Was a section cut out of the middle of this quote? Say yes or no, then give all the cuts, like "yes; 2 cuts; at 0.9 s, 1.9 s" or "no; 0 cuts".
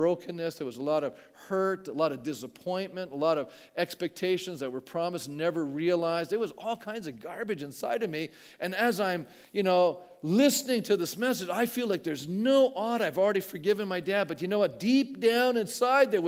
no; 0 cuts